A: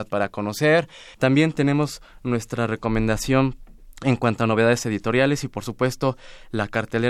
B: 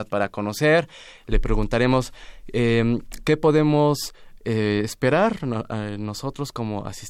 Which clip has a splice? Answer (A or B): A